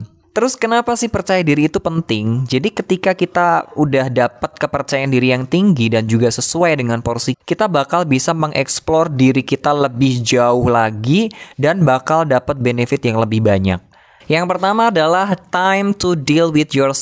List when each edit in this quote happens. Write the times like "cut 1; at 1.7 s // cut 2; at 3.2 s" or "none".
cut 1; at 7.3 s // cut 2; at 14.2 s